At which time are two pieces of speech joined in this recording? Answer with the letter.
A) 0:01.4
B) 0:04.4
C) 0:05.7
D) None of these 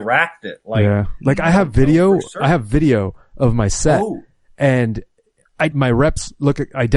C